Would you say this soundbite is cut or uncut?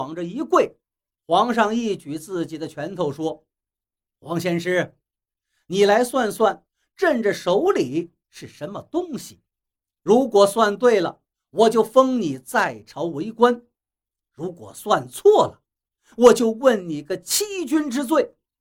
uncut